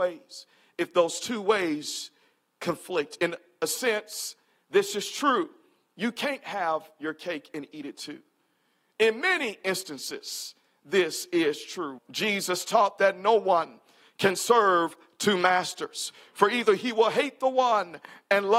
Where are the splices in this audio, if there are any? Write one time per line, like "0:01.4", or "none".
0:12.0